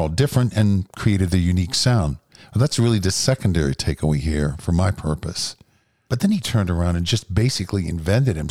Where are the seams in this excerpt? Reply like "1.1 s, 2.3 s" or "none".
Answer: 6.1 s